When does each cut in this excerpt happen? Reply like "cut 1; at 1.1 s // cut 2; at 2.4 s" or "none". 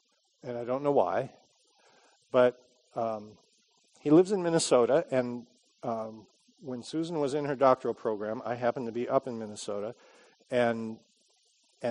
none